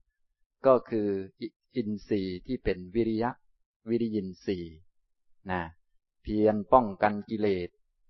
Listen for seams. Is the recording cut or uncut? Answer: uncut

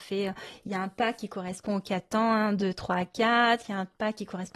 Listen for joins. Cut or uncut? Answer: uncut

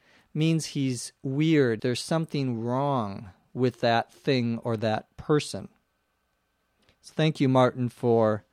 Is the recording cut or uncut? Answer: cut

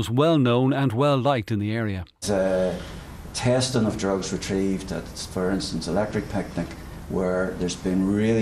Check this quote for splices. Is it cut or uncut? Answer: cut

